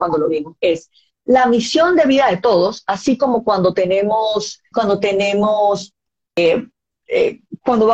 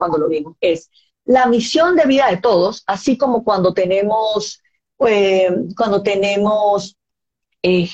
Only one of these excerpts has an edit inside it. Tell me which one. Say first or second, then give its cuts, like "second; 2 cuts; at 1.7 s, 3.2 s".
first; 2 cuts; at 4.7 s, 6.3 s